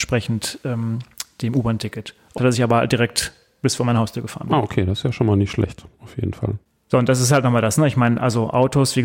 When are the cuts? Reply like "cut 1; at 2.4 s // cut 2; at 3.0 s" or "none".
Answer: cut 1; at 2.4 s